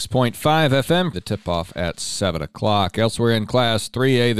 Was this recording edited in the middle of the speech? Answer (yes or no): yes